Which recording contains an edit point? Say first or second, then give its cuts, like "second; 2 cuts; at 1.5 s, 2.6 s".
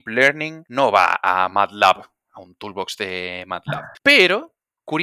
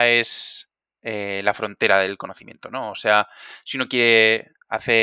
first; 1 cut; at 4.0 s